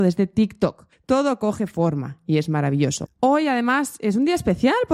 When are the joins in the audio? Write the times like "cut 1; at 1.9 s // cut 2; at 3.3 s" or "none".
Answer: cut 1; at 0.9 s // cut 2; at 3.0 s